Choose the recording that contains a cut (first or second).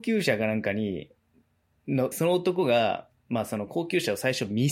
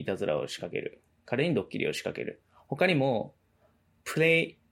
first